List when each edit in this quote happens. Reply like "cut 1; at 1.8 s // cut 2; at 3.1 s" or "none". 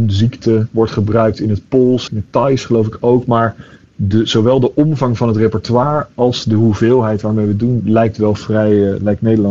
cut 1; at 2.1 s